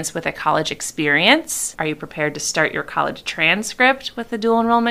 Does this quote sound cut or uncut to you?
cut